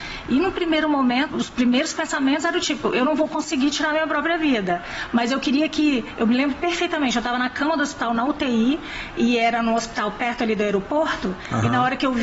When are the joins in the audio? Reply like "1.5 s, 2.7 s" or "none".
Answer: 1.3 s